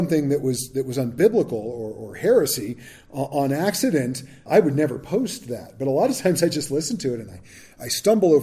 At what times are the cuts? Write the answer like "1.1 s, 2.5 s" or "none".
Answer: 4.5 s